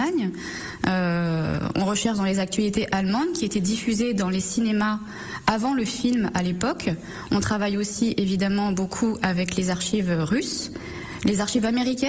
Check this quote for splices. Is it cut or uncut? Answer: uncut